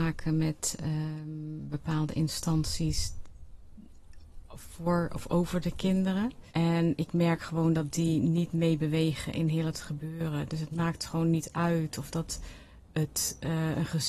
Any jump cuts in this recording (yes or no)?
yes